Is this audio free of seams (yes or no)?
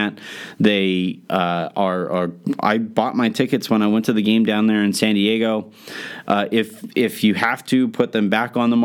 no